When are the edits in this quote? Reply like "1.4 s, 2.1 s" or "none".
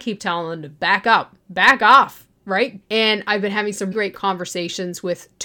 2.8 s, 3.9 s